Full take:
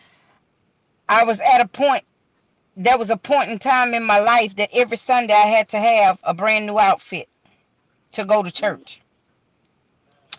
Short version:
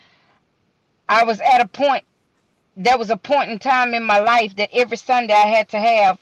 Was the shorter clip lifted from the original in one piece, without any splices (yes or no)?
yes